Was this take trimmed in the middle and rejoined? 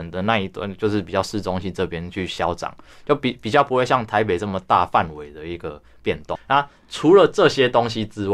yes; 1 cut; at 6.3 s

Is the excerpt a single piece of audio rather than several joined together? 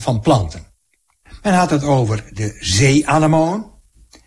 yes; 0 cuts

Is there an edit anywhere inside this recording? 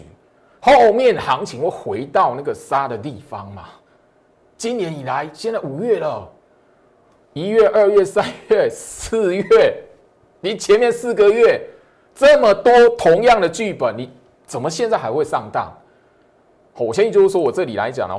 no; 0 cuts

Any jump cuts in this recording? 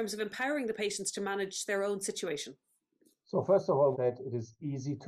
yes; 1 cut; at 3.9 s

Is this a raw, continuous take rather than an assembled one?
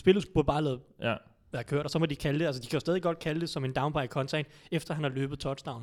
yes; 0 cuts

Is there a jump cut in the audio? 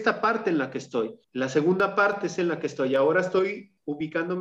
no; 0 cuts

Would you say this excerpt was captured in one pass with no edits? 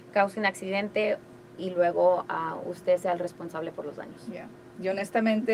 yes; 0 cuts

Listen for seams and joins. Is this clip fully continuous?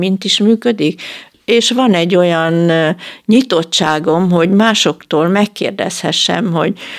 yes; 0 cuts

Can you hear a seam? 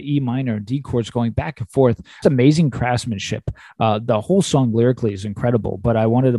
yes; 1 cut; at 2.2 s

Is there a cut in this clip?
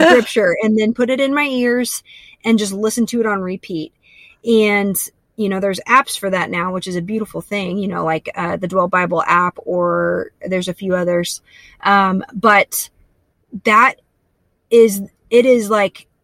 no; 0 cuts

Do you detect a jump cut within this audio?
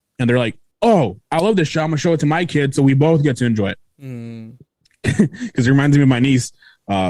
no; 0 cuts

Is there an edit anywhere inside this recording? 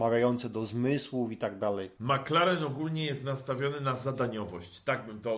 yes; 1 cut; at 1.9 s

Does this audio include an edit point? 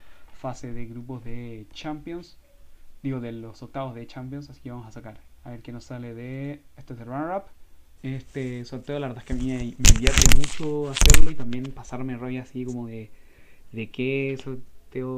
yes; 1 cut; at 8.0 s

